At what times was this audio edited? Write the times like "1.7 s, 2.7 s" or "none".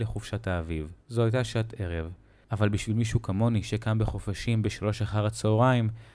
1.0 s